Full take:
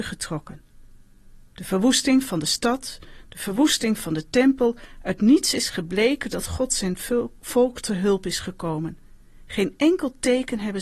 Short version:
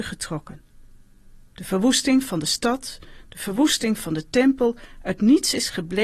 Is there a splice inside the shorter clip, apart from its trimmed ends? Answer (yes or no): no